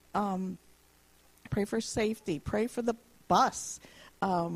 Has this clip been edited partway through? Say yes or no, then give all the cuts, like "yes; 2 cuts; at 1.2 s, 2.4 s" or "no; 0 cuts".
yes; 1 cut; at 1.5 s